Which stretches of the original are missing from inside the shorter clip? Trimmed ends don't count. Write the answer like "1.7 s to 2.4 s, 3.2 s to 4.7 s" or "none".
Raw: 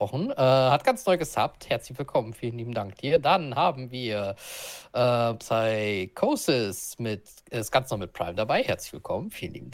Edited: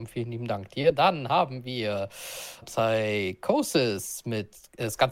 4.9 s to 5.4 s